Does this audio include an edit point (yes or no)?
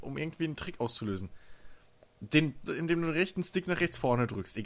yes